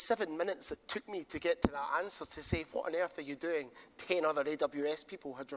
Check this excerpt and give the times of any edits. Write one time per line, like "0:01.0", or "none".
none